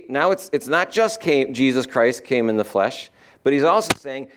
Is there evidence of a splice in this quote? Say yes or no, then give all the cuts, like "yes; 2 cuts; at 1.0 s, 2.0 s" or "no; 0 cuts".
no; 0 cuts